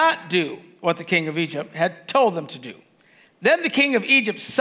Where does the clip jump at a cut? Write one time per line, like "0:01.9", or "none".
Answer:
0:03.3

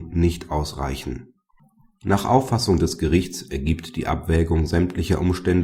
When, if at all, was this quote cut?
none

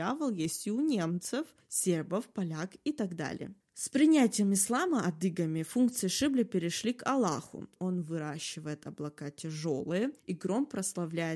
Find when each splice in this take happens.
0:07.8

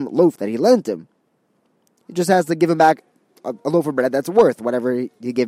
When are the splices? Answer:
none

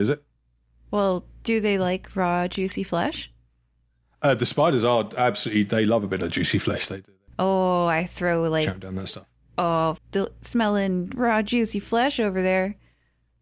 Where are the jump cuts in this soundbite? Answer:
0:10.0

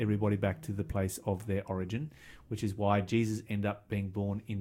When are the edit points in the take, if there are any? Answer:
none

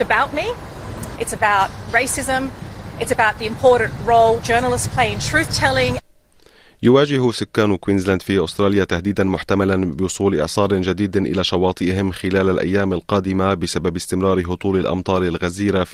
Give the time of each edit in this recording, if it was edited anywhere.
0:01.2

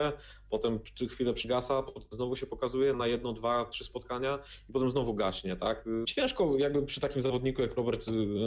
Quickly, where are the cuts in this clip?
0:02.9
0:06.0

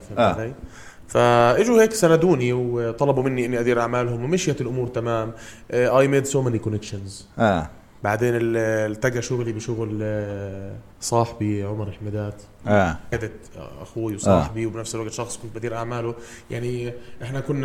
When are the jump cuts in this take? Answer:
0:10.9
0:13.1

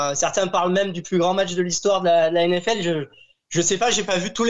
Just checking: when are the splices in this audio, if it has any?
none

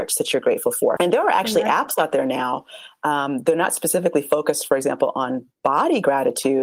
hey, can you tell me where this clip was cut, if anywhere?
0:01.0

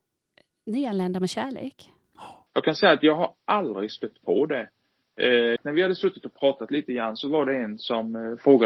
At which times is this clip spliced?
0:02.5
0:05.6

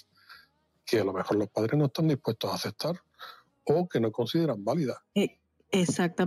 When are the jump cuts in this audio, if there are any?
0:05.1

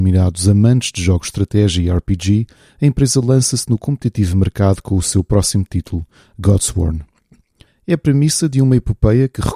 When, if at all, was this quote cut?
0:07.7

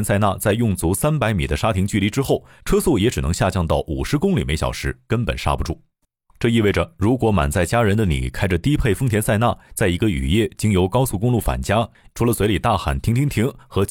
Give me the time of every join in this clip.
0:12.1

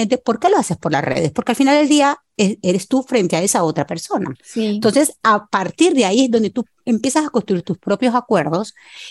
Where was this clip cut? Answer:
none

